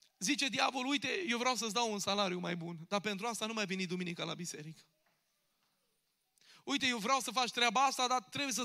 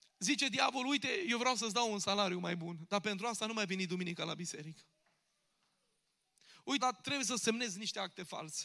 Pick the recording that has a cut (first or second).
second